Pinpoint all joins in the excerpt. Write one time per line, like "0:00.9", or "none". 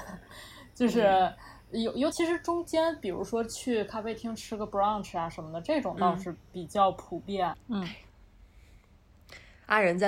0:02.1
0:07.5